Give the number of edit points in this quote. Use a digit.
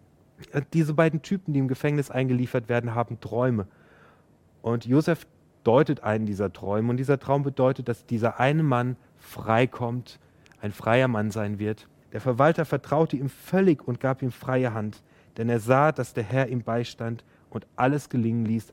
1